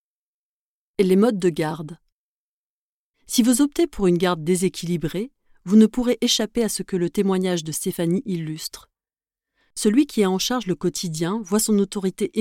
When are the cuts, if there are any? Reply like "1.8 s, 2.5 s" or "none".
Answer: 3.1 s

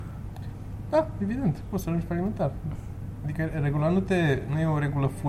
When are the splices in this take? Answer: none

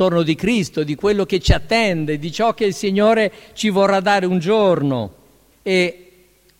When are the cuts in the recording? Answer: 5.5 s

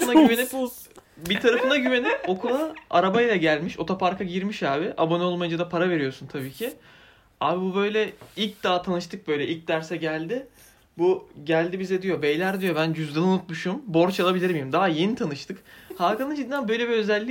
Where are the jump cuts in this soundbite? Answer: none

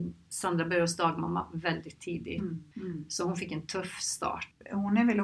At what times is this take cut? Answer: none

